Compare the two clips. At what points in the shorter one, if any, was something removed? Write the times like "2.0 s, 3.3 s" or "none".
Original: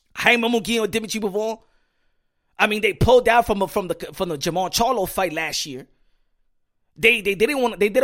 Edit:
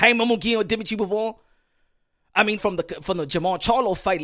2.6 s